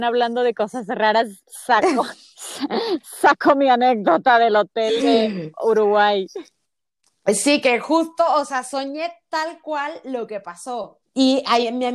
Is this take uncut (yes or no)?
no